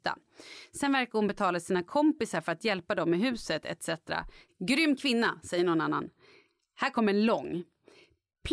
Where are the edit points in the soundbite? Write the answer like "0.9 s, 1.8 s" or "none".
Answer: 4.5 s